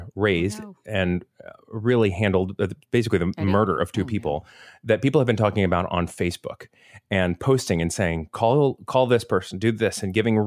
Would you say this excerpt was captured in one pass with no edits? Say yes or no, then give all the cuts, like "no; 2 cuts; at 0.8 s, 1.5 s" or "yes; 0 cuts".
yes; 0 cuts